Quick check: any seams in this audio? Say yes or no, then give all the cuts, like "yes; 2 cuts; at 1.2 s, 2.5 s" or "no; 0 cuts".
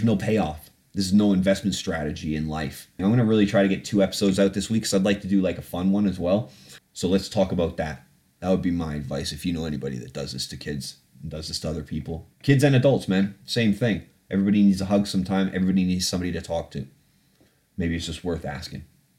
yes; 3 cuts; at 3.0 s, 6.8 s, 12.3 s